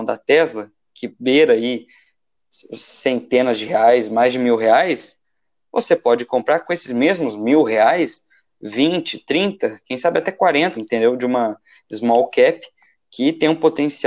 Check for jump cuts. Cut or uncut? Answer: cut